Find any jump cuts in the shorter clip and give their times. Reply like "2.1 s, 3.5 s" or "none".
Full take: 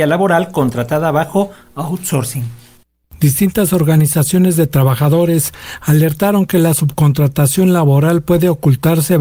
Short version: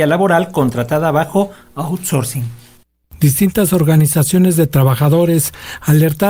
none